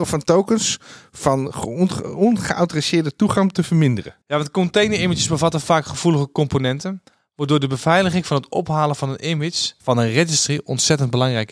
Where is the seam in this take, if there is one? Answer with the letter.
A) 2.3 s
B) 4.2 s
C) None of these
B